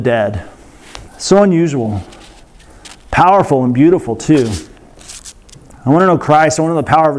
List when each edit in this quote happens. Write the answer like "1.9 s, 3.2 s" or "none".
1.1 s